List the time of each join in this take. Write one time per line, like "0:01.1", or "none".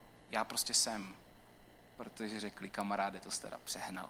0:01.7

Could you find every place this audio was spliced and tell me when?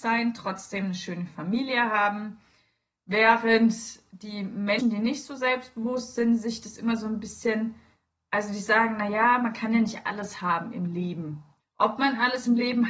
0:11.6

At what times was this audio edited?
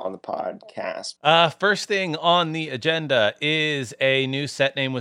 0:01.2

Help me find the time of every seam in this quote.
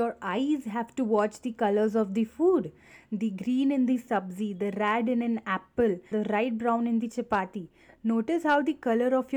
0:06.1

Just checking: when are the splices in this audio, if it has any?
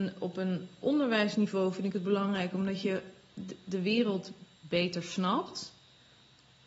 none

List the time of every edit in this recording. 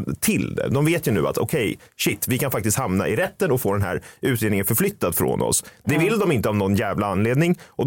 none

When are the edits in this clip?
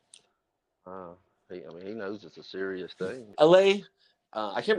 0:03.3

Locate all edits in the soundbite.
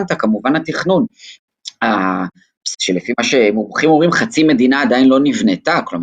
0:02.7

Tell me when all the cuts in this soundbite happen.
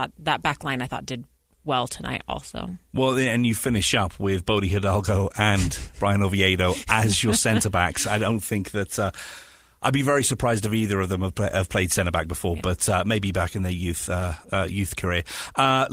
none

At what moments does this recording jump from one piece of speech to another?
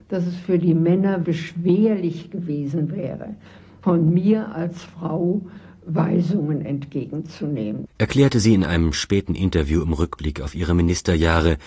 0:01.2

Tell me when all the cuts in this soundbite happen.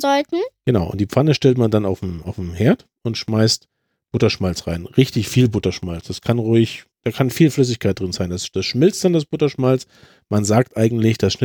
none

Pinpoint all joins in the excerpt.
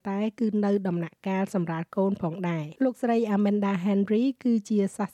0:02.8

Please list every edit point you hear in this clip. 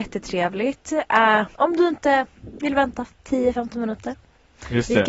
0:01.5

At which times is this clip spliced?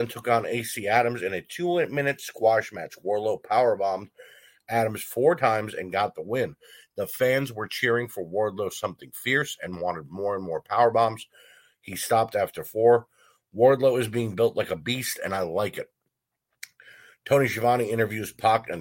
none

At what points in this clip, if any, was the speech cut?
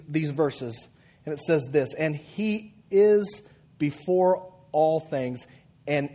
none

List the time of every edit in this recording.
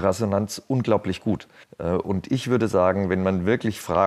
0:01.6

